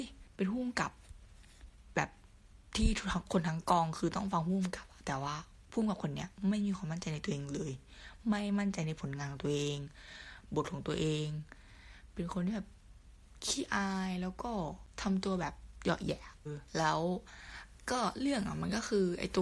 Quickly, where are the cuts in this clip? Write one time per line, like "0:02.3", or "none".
0:16.5